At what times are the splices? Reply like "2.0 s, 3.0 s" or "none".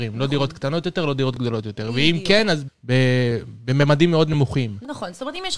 2.7 s